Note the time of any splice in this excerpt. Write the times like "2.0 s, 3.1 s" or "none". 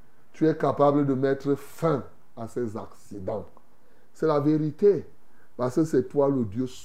none